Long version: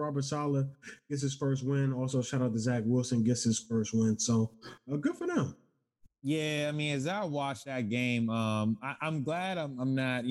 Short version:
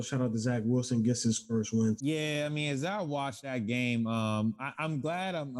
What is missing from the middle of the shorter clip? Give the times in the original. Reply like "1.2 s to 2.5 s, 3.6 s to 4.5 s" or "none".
4.2 s to 6.2 s

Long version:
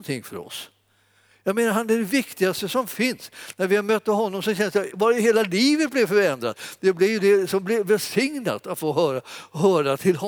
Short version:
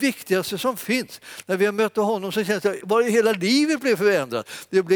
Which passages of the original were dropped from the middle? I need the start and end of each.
none

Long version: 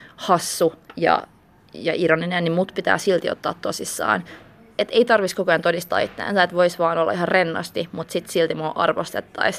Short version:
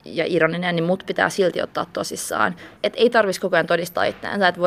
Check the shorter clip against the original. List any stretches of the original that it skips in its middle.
4.4 s to 4.7 s

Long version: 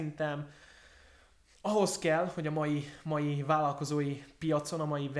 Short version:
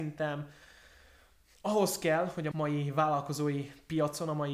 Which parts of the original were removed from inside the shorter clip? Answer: 2.5 s to 3.0 s

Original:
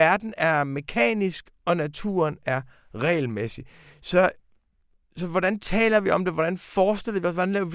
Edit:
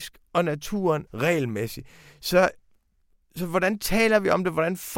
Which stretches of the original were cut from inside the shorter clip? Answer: 2.4 s to 2.9 s

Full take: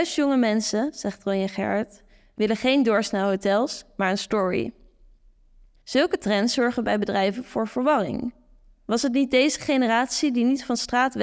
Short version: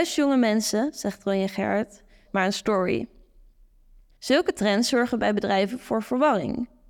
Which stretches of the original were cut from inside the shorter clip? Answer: 2.2 s to 3.9 s

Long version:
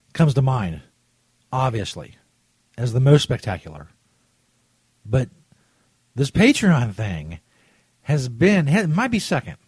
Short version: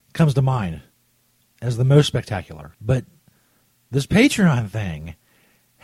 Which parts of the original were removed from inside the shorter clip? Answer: 1.5 s to 2.6 s, 3.9 s to 5.0 s

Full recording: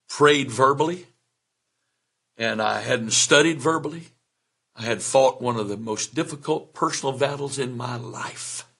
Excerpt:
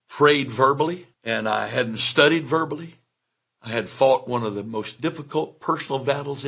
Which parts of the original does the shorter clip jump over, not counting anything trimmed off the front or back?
1.1 s to 2.3 s

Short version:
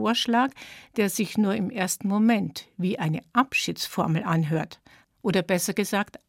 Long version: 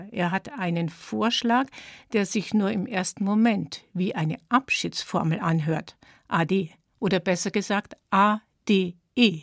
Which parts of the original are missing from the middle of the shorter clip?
6.2 s to 6.8 s

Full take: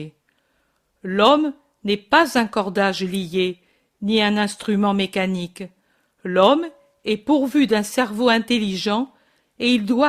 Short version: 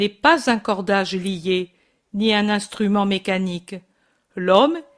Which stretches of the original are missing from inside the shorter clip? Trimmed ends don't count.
none

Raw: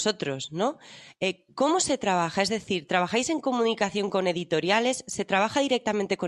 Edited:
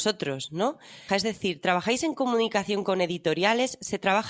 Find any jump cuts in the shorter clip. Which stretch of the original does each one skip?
1.1 s to 2.3 s

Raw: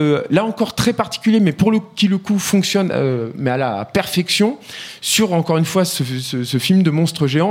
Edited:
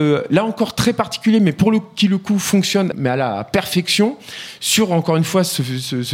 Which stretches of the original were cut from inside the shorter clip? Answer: 2.9 s to 3.3 s

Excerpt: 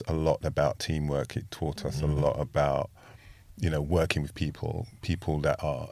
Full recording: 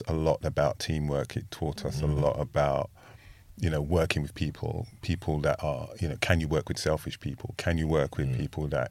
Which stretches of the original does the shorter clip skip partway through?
none

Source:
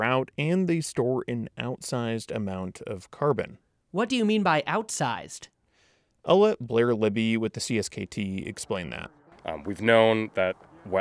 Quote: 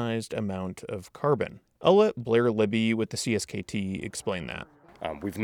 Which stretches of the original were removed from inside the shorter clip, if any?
3.6 s to 6.1 s

